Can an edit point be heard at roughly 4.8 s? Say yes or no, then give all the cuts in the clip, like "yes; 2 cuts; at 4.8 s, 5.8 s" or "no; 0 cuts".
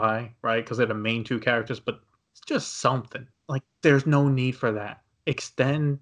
no; 2 cuts; at 2.2 s, 3.3 s